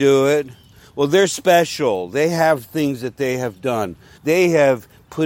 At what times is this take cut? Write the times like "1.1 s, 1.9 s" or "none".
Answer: 4.2 s